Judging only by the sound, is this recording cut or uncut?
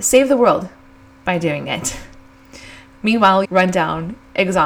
cut